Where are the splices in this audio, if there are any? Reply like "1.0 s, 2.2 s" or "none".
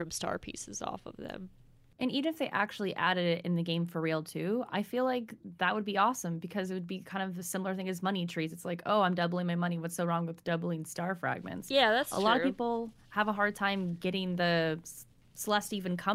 none